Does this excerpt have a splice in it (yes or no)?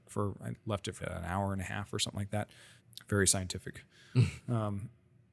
yes